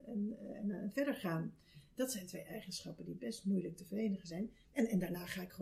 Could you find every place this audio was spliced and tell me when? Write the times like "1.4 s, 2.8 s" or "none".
4.6 s